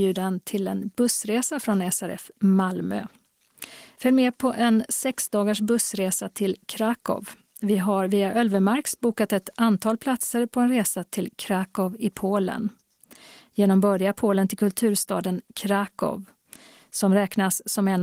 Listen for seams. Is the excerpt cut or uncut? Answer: uncut